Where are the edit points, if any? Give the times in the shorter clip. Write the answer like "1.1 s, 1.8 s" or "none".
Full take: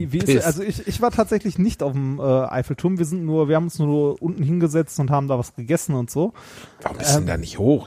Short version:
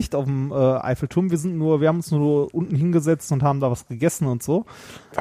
none